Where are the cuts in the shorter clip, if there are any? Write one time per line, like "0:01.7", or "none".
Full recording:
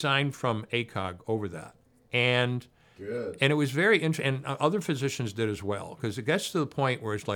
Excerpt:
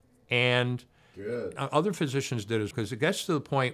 0:01.6
0:02.7